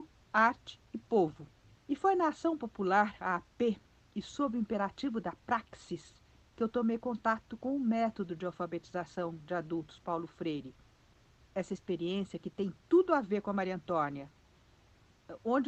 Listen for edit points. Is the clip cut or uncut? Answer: cut